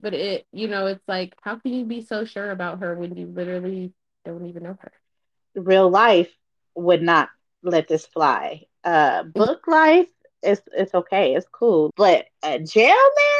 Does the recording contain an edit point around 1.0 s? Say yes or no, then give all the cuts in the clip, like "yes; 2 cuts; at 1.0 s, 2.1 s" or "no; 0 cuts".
no; 1 cut; at 11.9 s